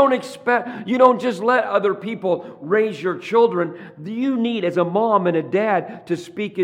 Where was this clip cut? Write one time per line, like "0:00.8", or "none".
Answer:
none